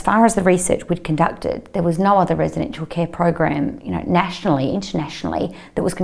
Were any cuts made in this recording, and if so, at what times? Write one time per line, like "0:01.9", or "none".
0:04.7